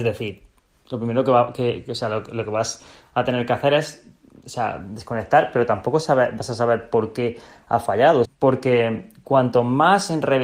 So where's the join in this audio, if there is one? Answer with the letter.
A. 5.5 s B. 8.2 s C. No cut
B